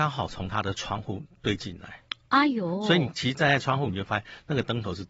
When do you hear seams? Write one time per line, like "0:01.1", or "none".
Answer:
0:03.9